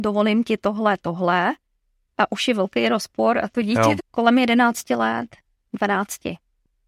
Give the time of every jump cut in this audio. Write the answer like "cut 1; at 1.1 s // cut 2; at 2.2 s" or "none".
cut 1; at 4.0 s